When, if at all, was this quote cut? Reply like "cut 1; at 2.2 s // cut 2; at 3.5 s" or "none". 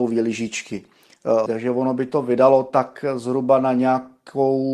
cut 1; at 1.5 s